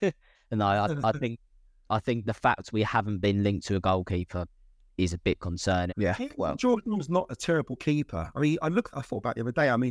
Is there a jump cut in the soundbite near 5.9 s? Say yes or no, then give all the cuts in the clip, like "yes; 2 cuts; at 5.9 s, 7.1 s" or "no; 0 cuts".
yes; 1 cut; at 5.9 s